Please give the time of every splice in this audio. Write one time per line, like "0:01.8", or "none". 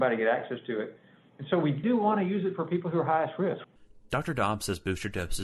0:01.8